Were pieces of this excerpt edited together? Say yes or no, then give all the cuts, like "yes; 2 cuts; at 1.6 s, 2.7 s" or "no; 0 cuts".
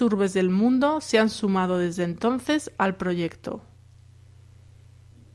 no; 0 cuts